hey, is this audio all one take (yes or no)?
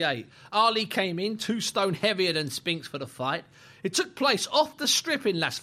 yes